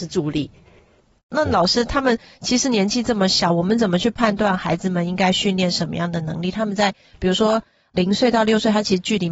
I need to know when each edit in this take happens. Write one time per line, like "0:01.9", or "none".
0:01.2